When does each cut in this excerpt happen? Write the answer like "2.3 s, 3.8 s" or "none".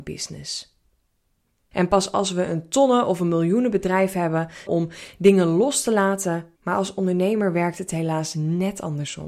1.7 s, 4.7 s, 6.6 s